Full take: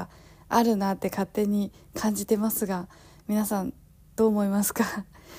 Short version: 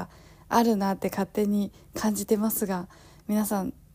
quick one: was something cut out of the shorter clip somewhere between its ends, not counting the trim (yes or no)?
no